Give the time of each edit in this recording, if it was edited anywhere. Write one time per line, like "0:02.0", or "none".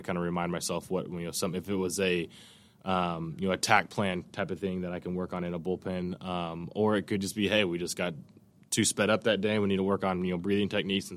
none